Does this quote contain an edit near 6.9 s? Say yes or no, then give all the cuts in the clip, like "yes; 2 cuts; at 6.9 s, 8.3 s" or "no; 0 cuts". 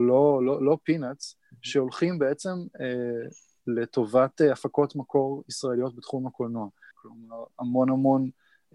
yes; 1 cut; at 6.9 s